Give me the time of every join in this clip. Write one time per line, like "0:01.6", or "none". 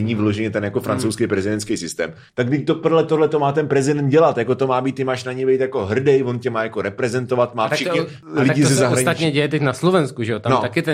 0:02.3